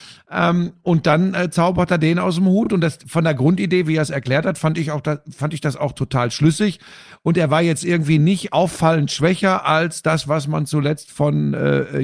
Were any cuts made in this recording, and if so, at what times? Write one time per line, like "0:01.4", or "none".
none